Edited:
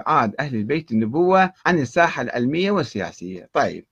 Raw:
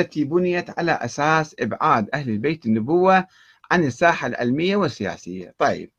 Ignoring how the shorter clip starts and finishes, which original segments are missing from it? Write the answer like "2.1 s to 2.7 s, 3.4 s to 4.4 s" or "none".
3.3 s to 3.6 s